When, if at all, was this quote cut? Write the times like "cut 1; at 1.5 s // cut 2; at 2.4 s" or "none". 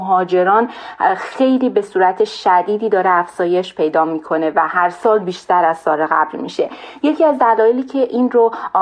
none

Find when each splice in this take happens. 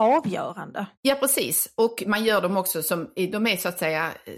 cut 1; at 0.9 s

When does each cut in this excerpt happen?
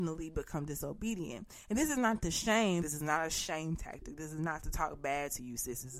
cut 1; at 2.8 s

